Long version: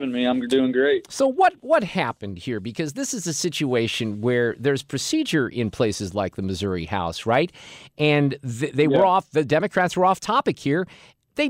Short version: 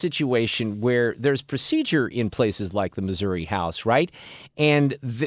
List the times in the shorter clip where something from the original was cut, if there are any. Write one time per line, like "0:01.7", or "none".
none

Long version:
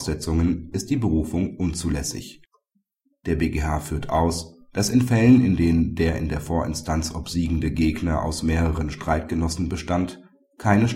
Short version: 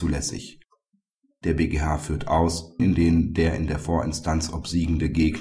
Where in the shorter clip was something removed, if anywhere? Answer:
0:02.8

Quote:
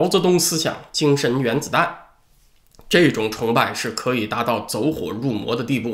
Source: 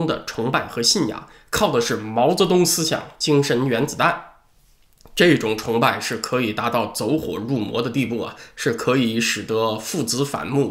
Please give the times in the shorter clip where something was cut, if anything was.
none

